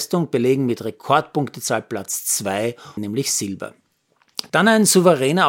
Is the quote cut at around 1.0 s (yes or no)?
no